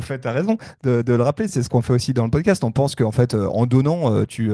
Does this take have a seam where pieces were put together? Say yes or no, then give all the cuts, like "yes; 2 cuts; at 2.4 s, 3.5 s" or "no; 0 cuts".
no; 0 cuts